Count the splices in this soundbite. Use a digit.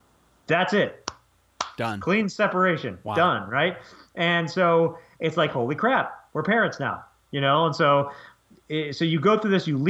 0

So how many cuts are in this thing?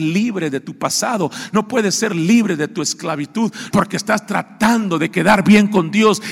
1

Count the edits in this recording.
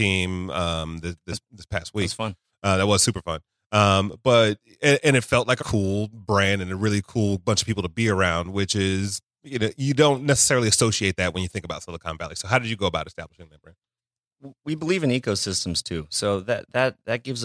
1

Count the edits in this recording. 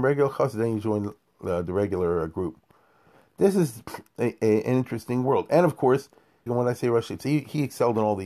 1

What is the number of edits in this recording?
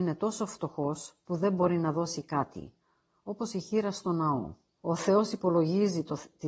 1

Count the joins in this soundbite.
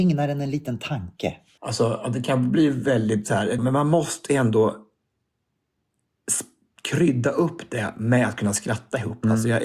2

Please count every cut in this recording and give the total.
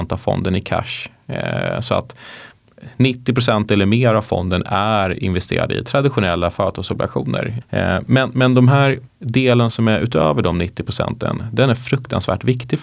2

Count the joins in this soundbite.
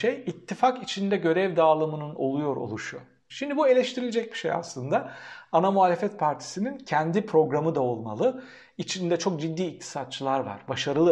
1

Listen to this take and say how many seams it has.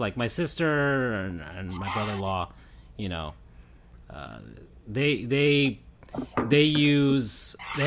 0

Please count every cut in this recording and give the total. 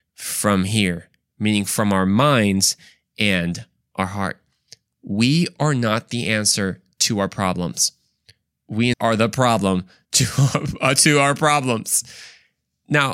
1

